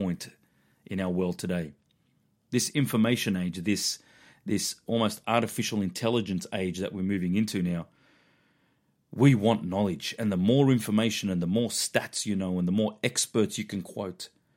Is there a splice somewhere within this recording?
no; 0 cuts

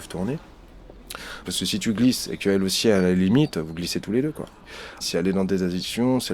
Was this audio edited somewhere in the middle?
yes; 2 cuts; at 1.4 s, 5.0 s

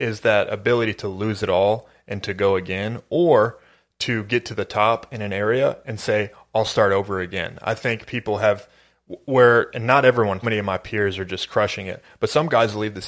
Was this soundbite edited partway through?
yes; 1 cut; at 10.4 s

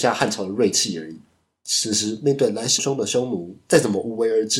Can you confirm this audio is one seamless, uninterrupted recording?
no; 2 cuts; at 1.6 s, 2.8 s

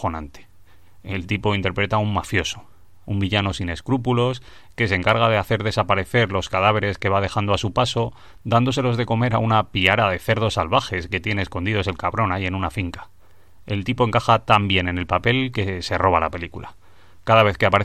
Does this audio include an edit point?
yes; 1 cut; at 3.0 s

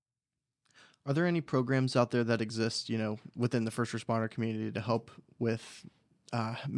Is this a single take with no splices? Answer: yes; 0 cuts

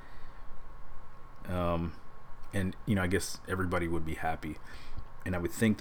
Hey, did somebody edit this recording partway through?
yes; 1 cut; at 1.4 s

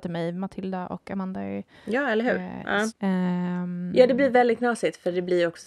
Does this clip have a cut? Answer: yes; 1 cut; at 2.9 s

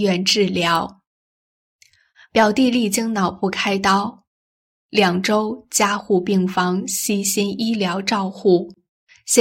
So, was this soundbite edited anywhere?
no; 0 cuts

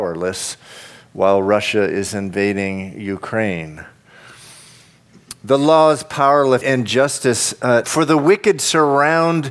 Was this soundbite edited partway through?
yes; 2 cuts; at 6.6 s, 7.8 s

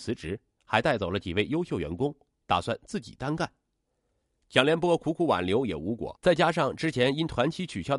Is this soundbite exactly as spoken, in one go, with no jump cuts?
no; 1 cut; at 6.2 s

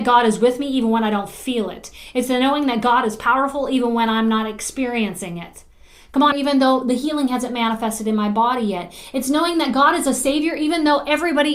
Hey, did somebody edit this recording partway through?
yes; 1 cut; at 6.3 s

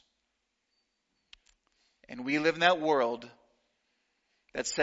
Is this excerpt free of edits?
yes; 0 cuts

